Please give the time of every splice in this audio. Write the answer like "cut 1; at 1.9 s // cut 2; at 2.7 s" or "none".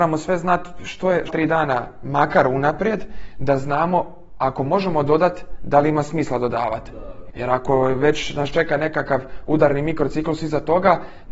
cut 1; at 1.3 s // cut 2; at 7.3 s